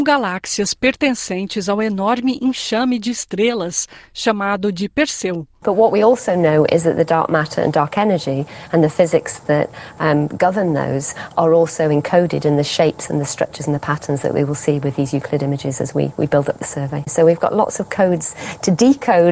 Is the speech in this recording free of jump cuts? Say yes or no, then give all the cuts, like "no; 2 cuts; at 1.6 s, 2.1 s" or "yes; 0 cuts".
no; 2 cuts; at 5.6 s, 17.1 s